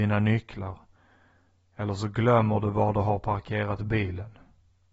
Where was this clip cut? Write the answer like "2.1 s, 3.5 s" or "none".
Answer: none